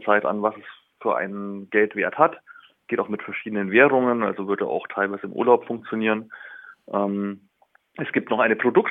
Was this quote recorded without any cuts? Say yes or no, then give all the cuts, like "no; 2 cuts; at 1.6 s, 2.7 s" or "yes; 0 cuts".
yes; 0 cuts